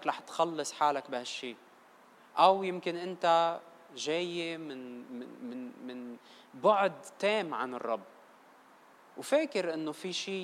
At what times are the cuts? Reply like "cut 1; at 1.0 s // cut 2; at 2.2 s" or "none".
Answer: none